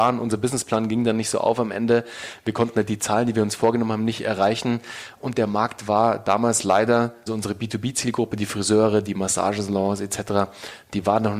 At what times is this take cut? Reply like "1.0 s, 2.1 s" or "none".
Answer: 7.3 s

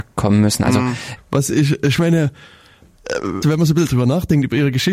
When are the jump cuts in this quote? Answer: 1.2 s, 3.4 s

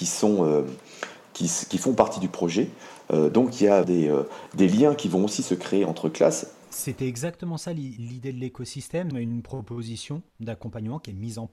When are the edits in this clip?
3.8 s, 6.6 s, 9.1 s

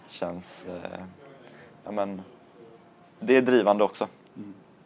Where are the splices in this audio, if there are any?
none

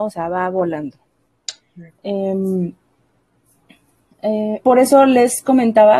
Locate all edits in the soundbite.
1.9 s, 4.6 s

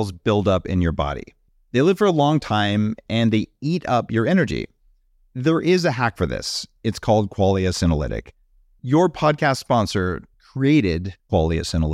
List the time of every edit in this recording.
10.3 s

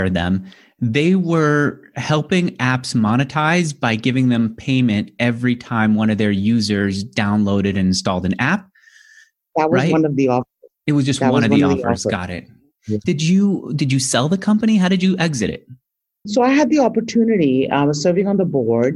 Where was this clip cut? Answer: 13.0 s

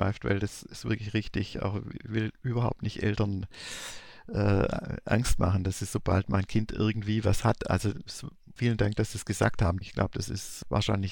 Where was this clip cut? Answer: 8.6 s, 9.8 s

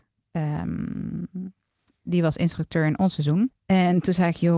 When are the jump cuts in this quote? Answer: 3.5 s

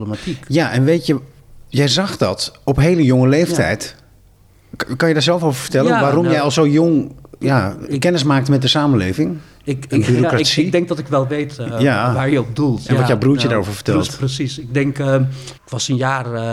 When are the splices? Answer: 15.6 s

